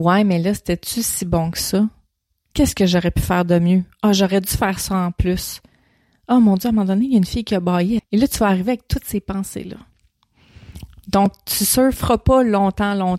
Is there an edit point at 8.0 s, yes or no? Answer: yes